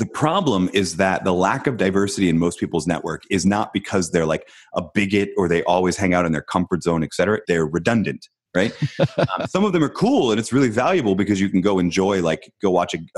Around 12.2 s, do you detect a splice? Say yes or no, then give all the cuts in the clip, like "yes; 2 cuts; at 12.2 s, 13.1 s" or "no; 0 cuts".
no; 1 cut; at 7.4 s